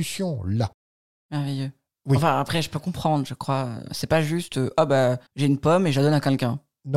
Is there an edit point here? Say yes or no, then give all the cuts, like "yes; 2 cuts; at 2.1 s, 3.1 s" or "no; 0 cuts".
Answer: yes; 2 cuts; at 3.9 s, 5.3 s